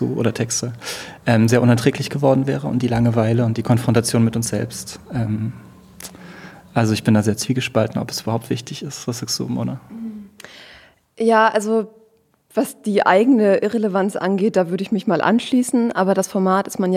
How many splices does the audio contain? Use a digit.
0